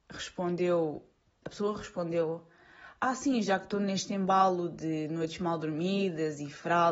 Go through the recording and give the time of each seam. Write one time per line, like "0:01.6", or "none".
0:01.4